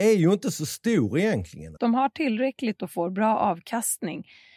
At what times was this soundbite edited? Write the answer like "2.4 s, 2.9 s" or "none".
1.8 s